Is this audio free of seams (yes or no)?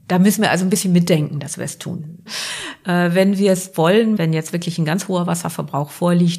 no